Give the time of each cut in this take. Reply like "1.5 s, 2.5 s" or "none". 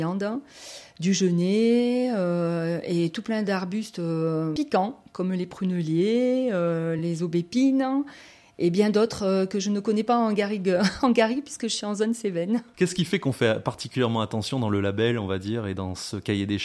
none